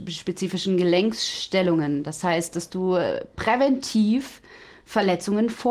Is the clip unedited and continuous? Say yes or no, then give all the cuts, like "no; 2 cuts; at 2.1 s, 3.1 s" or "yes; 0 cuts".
yes; 0 cuts